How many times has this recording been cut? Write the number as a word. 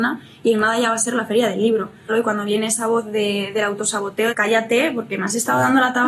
two